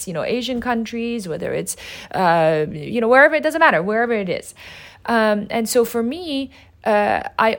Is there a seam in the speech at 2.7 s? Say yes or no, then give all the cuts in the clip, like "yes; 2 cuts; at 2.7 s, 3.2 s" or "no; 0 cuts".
no; 0 cuts